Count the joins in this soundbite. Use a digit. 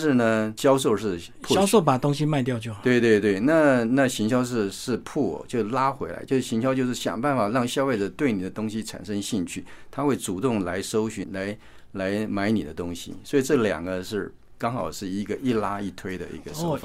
1